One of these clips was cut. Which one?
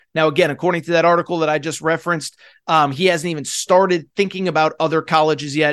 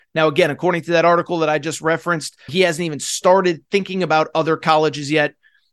second; 1 cut; at 2.5 s

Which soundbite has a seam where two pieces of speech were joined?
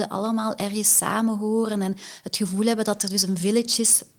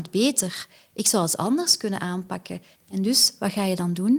second; 1 cut; at 2.8 s

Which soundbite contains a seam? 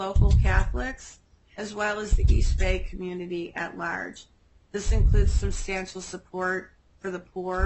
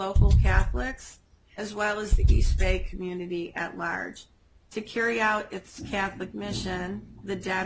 second; 1 cut; at 4.6 s

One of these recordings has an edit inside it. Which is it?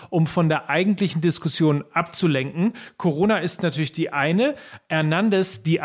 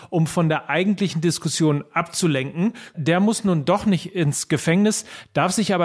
second; 1 cut; at 2.9 s

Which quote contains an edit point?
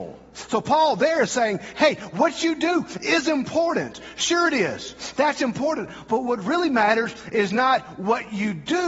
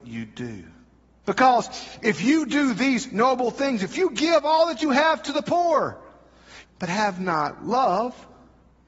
second; 2 cuts; at 1.2 s, 6.6 s

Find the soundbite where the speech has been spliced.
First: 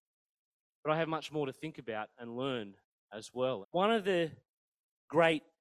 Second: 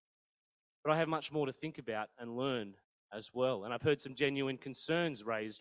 first; 1 cut; at 3.6 s

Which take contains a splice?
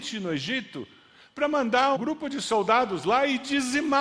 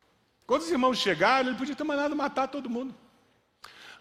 first; 1 cut; at 2.0 s

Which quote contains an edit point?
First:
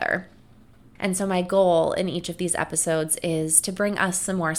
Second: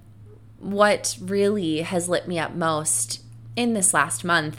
first; 1 cut; at 1.0 s

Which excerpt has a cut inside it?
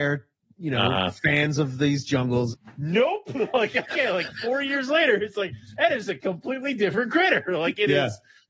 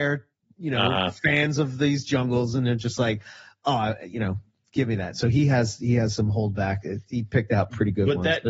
first; 1 cut; at 2.5 s

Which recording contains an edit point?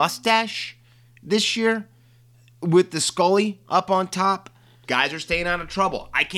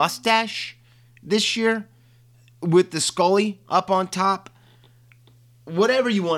first; 1 cut; at 4.8 s

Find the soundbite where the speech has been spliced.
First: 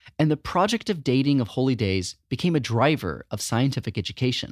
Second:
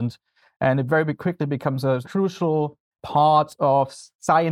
second; 1 cut; at 3.0 s

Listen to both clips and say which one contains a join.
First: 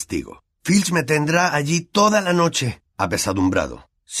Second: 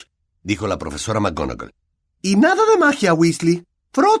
first; 1 cut; at 2.9 s

